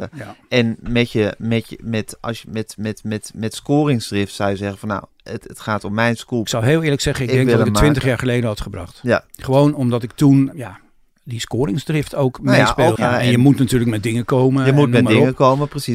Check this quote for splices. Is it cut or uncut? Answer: cut